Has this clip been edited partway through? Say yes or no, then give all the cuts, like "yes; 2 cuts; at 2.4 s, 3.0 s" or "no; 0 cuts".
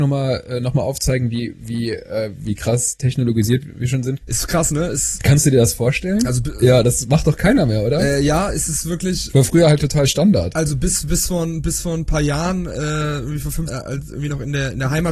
yes; 2 cuts; at 4.2 s, 13.7 s